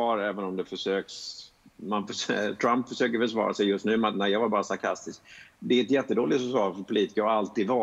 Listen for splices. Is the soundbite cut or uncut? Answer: uncut